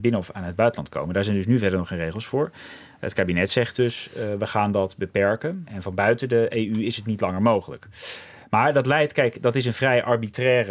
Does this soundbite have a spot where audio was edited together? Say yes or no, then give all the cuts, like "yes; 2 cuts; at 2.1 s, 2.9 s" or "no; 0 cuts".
no; 0 cuts